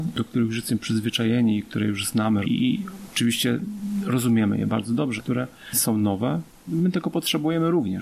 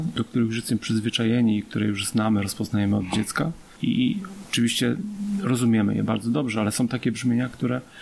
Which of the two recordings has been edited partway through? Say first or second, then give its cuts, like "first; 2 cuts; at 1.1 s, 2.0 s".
first; 2 cuts; at 2.4 s, 5.2 s